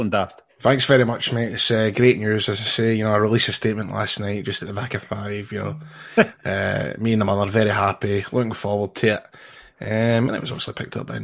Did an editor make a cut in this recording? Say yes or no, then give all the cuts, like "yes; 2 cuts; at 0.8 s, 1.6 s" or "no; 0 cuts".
no; 0 cuts